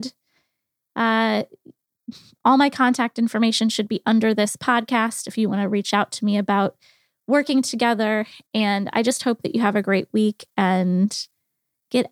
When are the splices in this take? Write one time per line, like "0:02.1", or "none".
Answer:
none

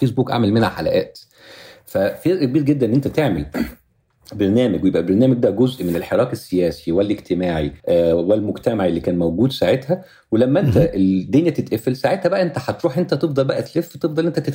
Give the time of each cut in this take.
0:07.8

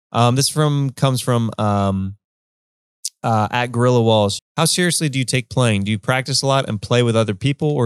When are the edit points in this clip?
0:04.4

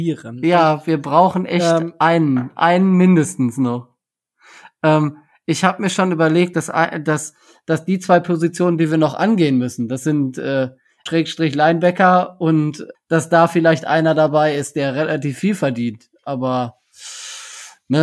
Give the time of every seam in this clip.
0:06.5
0:11.1
0:12.9

